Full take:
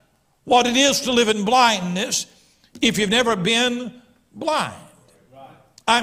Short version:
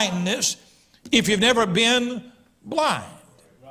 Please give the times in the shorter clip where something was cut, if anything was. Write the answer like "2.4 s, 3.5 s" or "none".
none